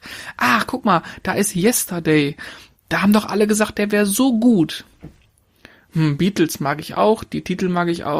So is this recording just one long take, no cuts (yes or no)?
yes